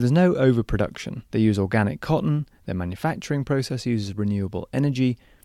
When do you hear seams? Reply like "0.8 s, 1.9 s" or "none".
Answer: 1.3 s, 2.6 s